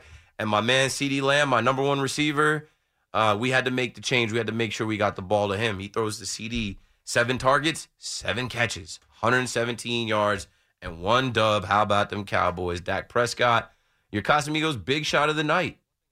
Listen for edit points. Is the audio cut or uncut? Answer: uncut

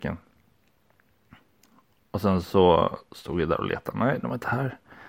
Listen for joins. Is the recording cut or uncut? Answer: uncut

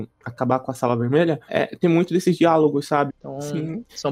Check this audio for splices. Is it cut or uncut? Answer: cut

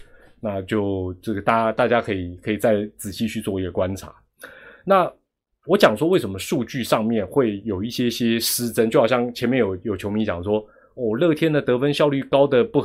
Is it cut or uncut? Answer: uncut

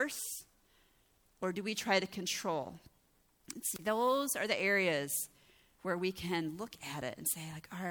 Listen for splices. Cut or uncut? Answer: uncut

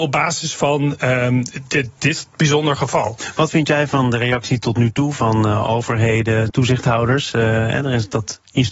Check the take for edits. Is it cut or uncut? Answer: cut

